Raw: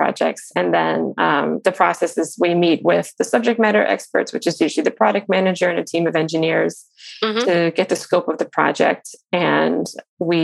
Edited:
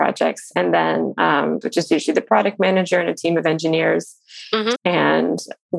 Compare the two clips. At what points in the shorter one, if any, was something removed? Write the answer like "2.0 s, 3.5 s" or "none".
1.6 s, 4.8 s